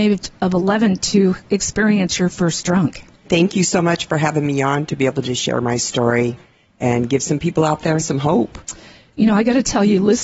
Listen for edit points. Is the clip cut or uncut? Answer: cut